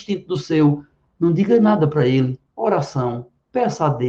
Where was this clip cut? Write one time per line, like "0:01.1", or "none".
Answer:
0:02.5